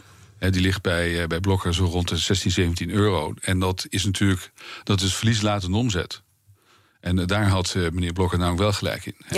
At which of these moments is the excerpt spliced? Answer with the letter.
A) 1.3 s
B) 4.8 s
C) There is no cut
B